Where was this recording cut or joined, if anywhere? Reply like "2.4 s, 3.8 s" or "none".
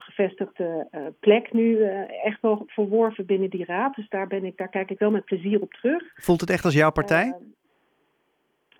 none